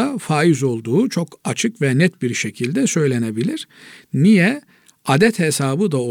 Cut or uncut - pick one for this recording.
uncut